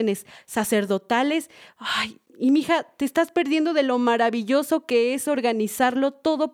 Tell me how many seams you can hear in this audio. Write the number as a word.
zero